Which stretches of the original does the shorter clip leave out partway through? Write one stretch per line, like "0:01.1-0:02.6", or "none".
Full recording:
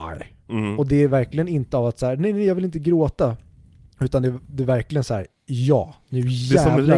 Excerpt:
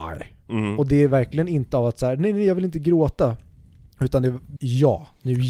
0:04.6-0:05.4